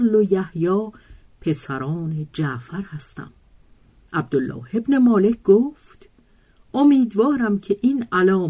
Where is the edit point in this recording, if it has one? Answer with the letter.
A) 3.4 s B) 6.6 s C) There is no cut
C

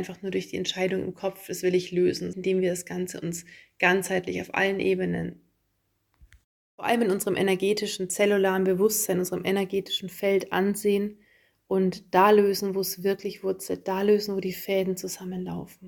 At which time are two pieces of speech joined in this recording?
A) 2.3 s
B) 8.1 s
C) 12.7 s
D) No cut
A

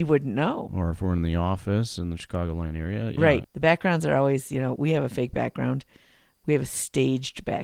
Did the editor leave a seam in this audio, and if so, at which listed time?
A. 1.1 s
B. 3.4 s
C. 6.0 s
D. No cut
B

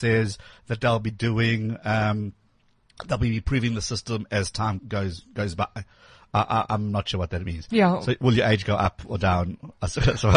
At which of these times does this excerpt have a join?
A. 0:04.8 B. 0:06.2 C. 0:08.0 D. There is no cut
A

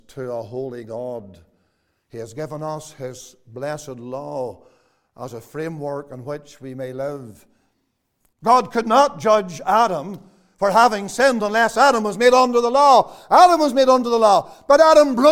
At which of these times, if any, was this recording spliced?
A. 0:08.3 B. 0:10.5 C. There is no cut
A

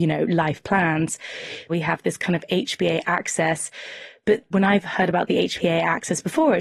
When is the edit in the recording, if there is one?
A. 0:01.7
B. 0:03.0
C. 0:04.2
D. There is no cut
A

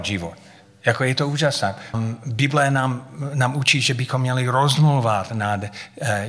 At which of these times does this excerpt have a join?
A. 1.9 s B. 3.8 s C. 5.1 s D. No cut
A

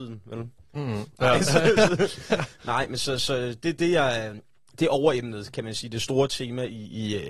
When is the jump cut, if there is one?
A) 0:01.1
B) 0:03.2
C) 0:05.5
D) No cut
A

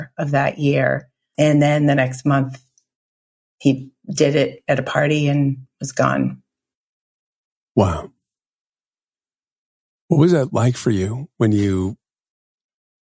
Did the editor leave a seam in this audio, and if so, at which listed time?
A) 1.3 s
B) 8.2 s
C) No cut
A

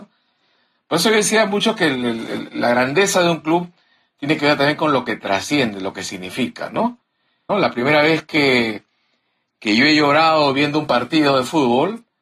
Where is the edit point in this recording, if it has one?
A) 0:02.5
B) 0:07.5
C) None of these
B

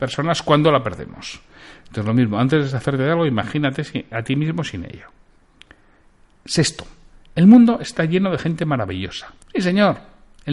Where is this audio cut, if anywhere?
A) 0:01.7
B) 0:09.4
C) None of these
B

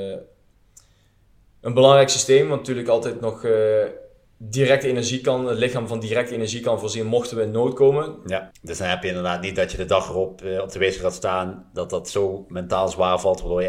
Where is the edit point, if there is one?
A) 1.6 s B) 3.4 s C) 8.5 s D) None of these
C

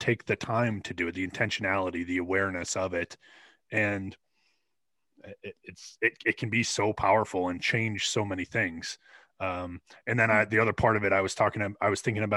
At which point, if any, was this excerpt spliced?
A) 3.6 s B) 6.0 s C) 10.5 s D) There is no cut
D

